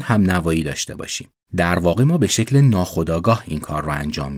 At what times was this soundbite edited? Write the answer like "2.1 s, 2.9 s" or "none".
none